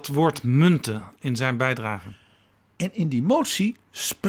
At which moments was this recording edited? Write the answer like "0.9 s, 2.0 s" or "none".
none